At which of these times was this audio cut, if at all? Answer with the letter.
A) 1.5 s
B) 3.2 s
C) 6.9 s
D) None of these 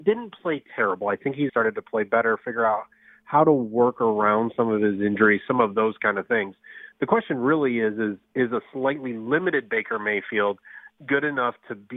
A